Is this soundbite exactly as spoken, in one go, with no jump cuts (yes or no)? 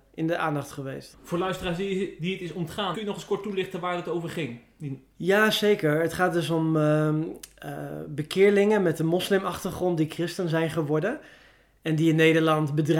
no